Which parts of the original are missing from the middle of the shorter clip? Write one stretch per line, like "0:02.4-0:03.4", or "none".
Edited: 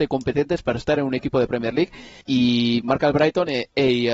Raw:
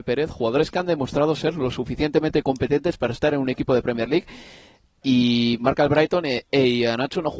0:04.6-0:05.0

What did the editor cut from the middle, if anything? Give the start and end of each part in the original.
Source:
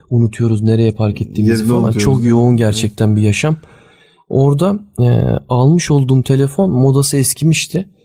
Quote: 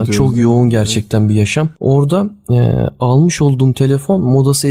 0:03.6-0:04.2

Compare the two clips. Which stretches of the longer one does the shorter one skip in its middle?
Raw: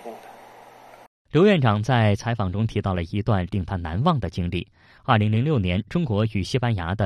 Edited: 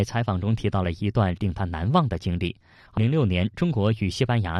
0:05.1-0:05.3

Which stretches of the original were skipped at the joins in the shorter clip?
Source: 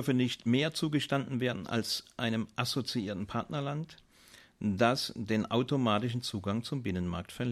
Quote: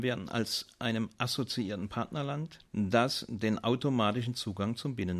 0:04.0-0:04.5

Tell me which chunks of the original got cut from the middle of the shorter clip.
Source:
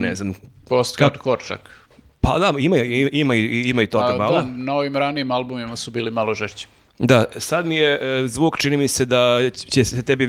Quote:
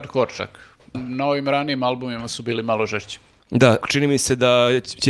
0:02.1-0:04.4
0:07.3-0:08.5

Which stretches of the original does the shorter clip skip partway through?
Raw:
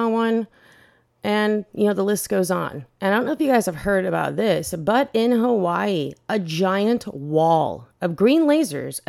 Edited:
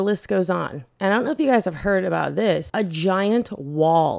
0:04.7-0:06.2

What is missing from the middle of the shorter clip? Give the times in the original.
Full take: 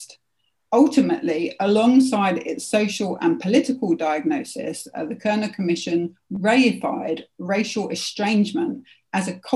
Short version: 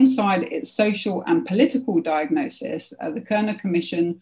none

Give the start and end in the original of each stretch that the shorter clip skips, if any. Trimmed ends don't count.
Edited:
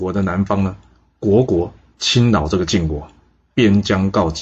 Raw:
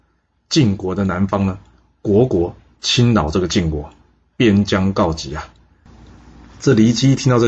none

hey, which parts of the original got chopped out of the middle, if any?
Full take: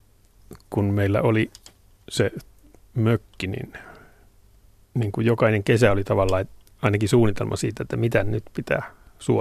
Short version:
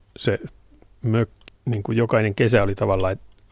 0:03.4-0:04.8

